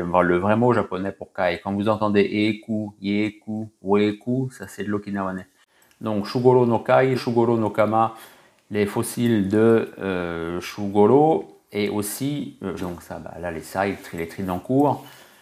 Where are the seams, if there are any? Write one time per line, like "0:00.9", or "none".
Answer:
0:07.2
0:12.8